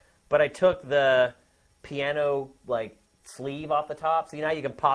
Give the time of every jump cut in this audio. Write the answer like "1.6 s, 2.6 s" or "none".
none